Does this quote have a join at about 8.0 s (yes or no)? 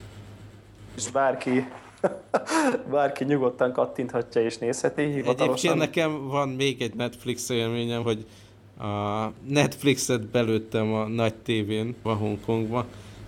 yes